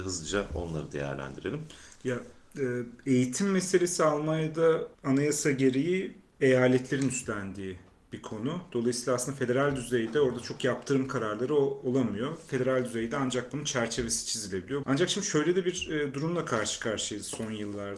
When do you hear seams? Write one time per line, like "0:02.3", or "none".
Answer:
0:04.9
0:14.8